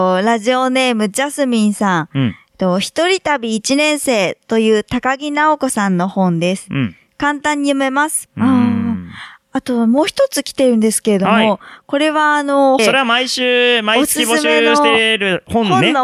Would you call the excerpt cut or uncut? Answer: cut